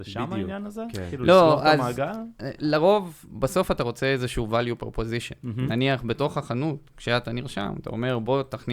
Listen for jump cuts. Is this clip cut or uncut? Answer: uncut